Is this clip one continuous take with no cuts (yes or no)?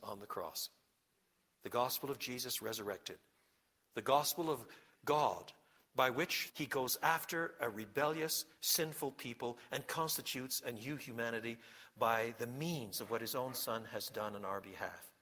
no